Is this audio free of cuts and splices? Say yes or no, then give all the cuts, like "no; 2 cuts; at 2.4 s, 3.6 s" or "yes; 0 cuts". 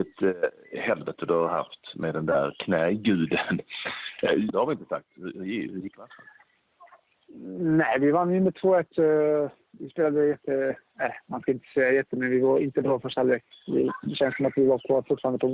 no; 1 cut; at 4.5 s